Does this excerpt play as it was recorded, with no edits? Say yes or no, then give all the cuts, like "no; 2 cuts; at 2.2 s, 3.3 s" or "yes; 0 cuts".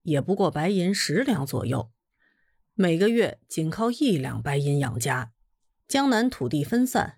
no; 1 cut; at 5.8 s